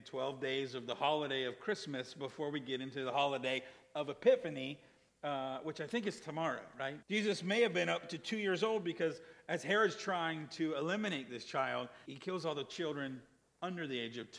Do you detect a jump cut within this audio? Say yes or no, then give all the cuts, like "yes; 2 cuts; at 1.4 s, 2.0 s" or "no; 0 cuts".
yes; 2 cuts; at 7.0 s, 12.0 s